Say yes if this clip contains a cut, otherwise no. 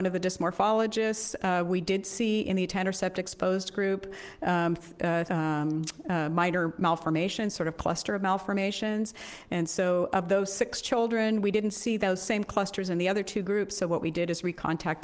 yes